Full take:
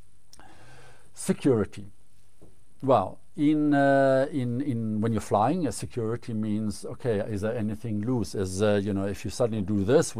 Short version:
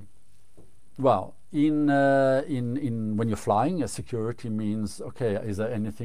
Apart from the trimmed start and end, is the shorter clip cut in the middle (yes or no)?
no